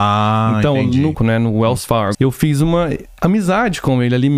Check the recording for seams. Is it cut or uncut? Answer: cut